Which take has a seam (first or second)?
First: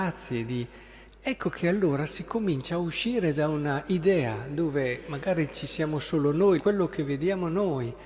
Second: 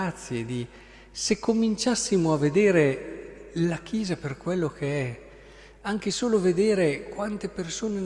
first